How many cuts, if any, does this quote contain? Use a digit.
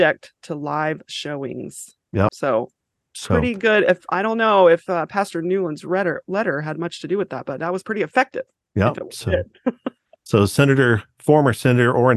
1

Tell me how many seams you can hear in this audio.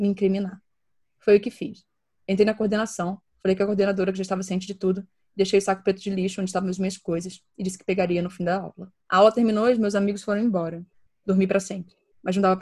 2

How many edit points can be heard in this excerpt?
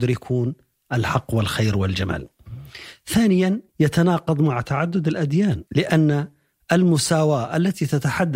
2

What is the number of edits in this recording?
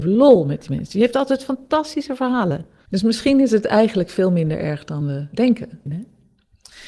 2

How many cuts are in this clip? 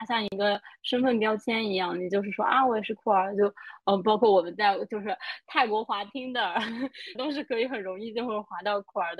1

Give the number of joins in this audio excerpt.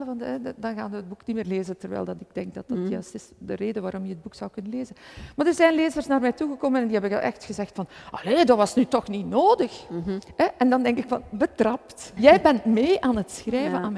1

